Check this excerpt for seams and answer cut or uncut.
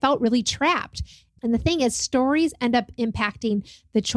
cut